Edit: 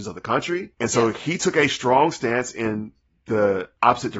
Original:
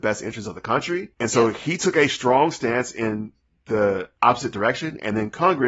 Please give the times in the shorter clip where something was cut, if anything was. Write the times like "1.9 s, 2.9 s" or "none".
none

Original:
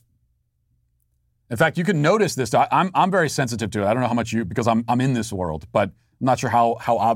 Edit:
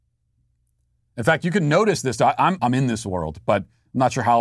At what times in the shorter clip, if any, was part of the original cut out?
2.6 s

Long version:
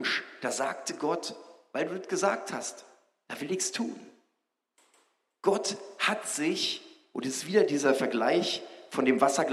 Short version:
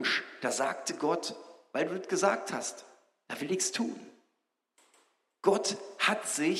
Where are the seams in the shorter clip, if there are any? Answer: none

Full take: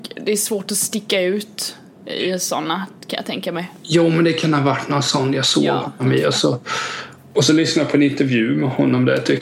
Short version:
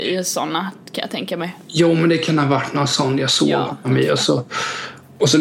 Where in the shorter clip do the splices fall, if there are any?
none

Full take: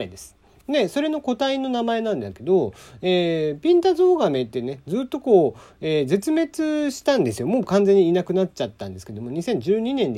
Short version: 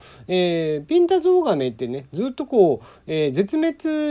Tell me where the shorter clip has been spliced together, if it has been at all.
none

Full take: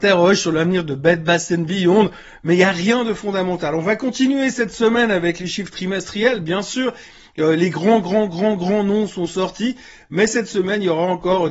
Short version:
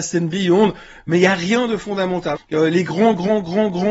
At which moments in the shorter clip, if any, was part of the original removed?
2.3 s

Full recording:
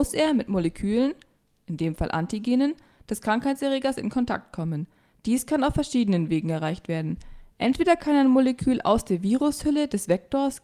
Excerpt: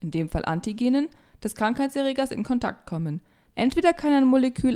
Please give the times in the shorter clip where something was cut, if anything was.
3.5 s

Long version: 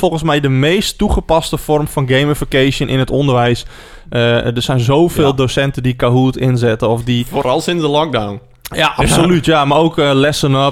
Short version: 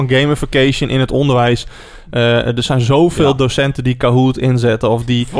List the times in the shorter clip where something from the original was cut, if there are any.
none

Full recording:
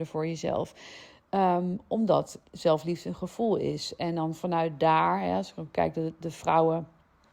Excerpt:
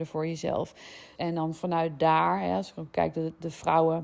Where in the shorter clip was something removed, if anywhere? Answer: 1.1 s

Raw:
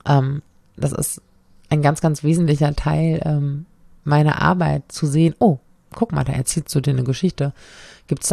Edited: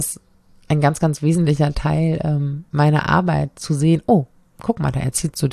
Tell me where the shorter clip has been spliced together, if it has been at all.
2.7 s

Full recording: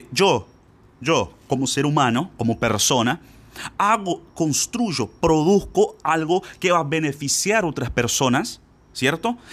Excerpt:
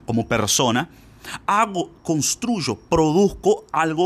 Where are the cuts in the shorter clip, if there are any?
none

